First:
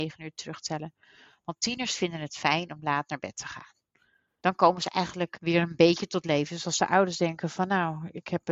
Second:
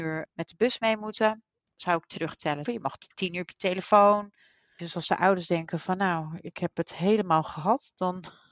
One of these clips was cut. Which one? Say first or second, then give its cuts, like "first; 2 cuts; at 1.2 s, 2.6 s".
second; 2 cuts; at 2.7 s, 4.8 s